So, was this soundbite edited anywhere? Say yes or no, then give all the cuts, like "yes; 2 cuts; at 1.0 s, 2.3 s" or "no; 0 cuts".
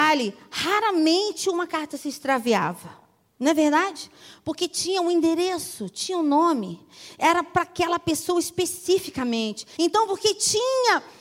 yes; 1 cut; at 9.8 s